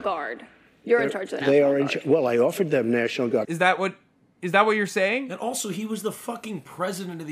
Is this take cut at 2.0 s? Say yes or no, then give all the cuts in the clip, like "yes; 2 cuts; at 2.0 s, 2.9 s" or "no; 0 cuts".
no; 1 cut; at 3.4 s